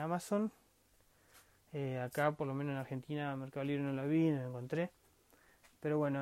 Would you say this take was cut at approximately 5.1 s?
no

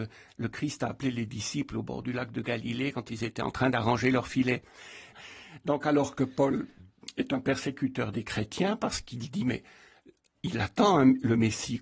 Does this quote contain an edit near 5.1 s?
yes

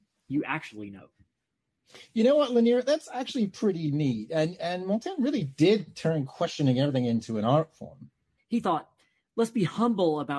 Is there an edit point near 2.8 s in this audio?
no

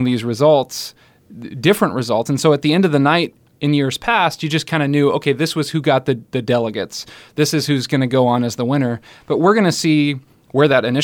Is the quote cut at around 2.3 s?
no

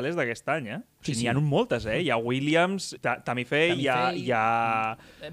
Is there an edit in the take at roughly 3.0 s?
yes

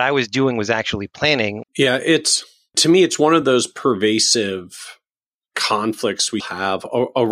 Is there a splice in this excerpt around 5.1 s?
no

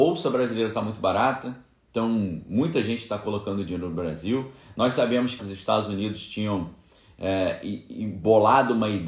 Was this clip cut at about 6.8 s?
no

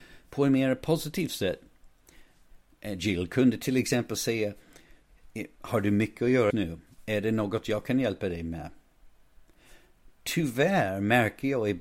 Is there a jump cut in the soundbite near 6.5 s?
yes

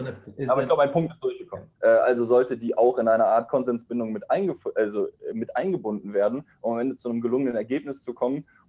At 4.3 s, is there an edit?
no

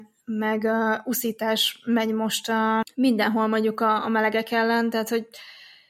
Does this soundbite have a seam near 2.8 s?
yes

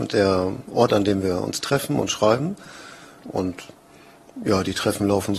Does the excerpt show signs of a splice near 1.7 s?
no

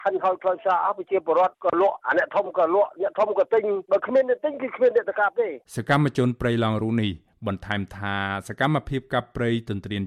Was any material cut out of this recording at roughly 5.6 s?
yes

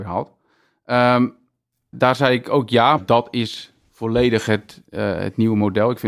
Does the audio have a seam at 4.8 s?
no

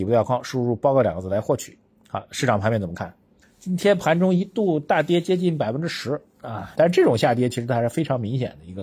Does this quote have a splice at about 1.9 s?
no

